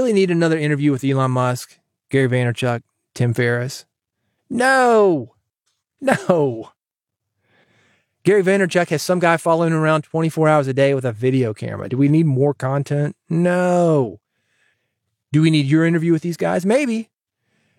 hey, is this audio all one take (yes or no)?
yes